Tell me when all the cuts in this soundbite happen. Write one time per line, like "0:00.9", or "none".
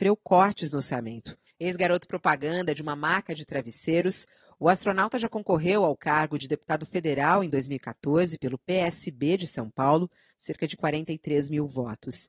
0:01.5
0:10.3